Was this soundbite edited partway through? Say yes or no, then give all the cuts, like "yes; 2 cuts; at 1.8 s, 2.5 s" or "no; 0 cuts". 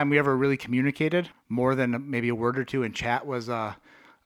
yes; 1 cut; at 1.3 s